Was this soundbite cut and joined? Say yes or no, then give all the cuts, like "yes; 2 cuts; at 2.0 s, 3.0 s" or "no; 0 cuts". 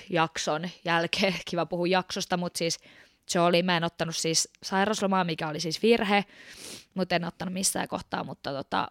no; 0 cuts